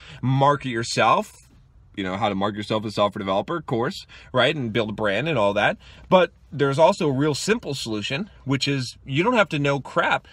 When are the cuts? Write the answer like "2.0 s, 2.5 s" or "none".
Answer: none